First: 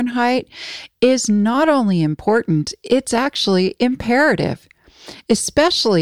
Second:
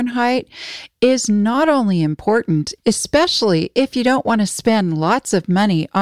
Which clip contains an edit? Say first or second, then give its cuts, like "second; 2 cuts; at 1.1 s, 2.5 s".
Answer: second; 1 cut; at 2.8 s